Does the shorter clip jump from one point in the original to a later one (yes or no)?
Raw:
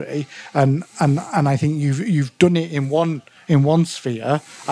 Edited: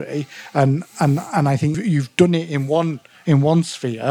yes